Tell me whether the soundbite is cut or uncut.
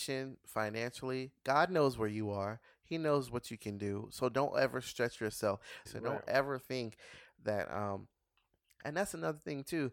cut